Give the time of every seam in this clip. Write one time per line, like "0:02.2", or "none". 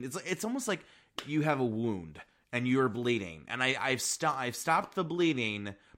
none